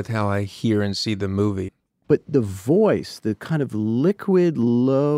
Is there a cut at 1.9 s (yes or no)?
yes